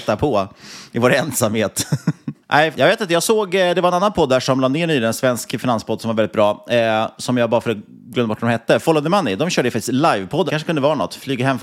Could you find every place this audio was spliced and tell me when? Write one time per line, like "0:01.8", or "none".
0:02.7
0:10.5